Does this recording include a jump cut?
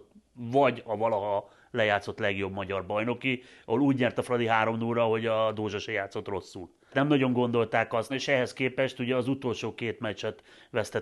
yes; 2 cuts; at 6.9 s, 8.1 s

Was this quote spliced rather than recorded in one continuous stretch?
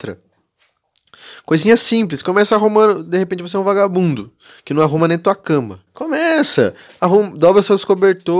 no; 0 cuts

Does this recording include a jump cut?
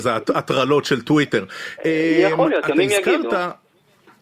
no; 0 cuts

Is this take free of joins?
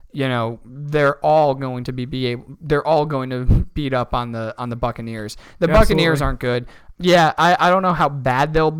no; 1 cut; at 6.9 s

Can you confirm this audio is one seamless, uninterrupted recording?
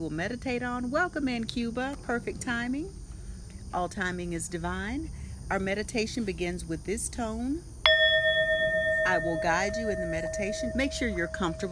no; 1 cut; at 10.7 s

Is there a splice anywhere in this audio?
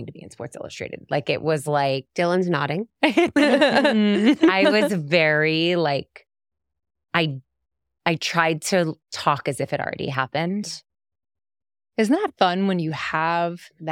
no; 0 cuts

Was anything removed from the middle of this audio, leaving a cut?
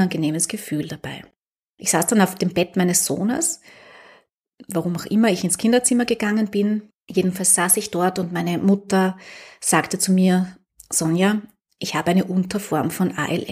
no; 0 cuts

